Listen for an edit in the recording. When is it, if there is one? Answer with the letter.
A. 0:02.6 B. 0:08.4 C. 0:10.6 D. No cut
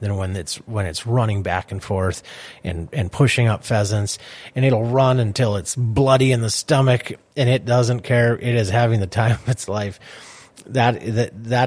D